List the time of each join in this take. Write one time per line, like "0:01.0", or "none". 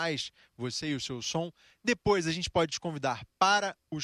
none